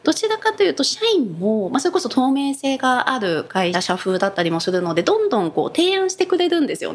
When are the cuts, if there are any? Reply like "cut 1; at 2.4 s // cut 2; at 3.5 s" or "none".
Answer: cut 1; at 3.7 s